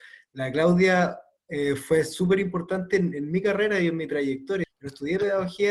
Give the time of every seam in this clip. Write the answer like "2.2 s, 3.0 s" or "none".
4.6 s